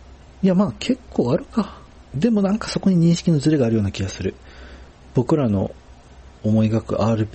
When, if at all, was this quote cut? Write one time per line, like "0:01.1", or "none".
0:02.0